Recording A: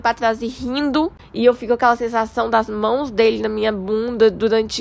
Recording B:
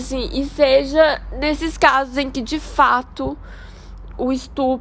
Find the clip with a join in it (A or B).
A